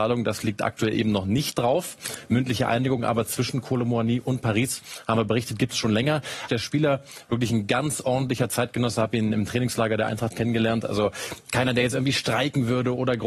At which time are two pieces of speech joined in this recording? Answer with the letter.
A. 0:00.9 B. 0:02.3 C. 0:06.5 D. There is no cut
C